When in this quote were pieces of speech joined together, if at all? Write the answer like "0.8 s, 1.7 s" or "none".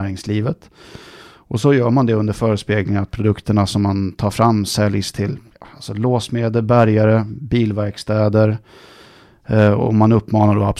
none